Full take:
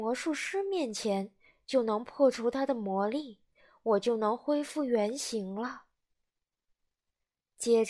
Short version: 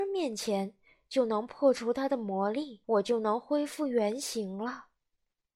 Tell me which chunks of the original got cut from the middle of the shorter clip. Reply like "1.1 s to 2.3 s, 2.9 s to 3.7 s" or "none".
3.4 s to 3.8 s